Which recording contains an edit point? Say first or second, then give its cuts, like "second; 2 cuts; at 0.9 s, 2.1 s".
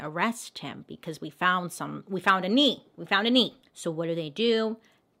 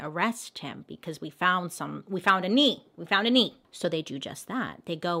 first; 1 cut; at 3.6 s